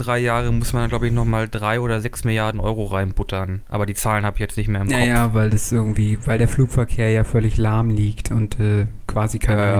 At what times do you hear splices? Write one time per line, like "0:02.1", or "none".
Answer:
none